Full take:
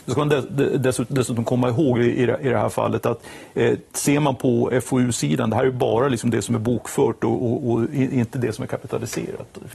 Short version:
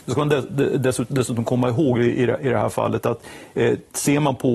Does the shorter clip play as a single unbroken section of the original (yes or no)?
yes